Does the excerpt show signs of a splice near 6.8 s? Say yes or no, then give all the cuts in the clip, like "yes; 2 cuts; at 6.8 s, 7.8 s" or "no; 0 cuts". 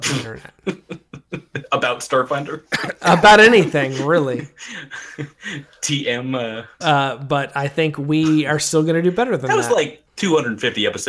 yes; 1 cut; at 6.8 s